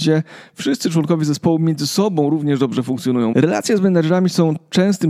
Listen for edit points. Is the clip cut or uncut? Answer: cut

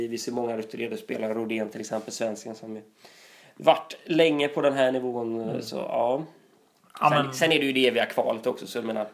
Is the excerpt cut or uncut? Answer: uncut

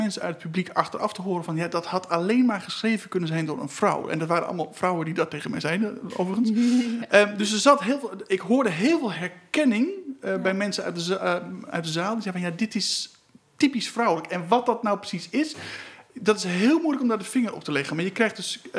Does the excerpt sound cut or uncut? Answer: uncut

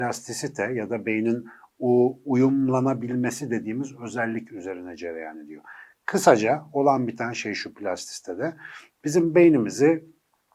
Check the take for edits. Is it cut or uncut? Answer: uncut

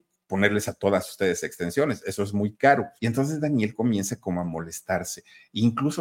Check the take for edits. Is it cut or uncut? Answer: cut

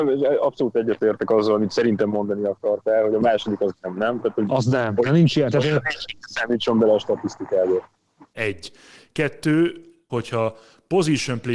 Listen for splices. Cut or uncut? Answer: cut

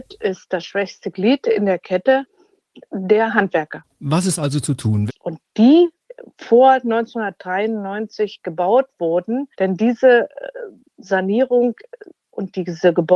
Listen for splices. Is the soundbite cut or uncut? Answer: cut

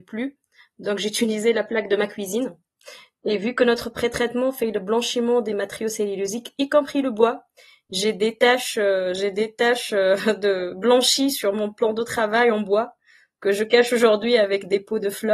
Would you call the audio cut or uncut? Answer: uncut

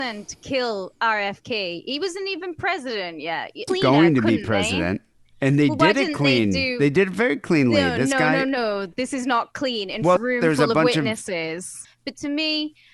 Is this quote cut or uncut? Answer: cut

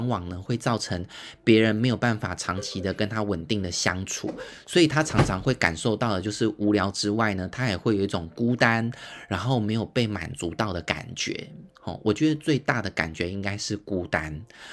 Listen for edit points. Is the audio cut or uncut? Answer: uncut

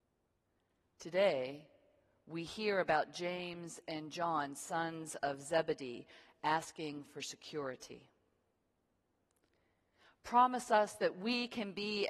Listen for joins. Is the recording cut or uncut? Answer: uncut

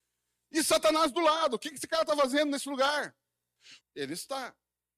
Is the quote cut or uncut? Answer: cut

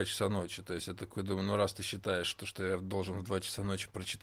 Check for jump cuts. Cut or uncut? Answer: uncut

